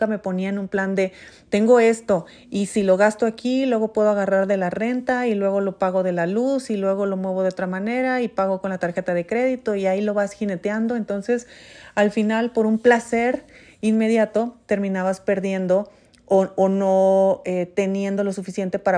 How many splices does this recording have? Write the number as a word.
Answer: zero